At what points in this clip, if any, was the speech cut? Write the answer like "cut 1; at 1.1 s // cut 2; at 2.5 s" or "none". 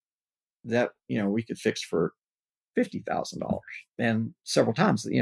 cut 1; at 3.9 s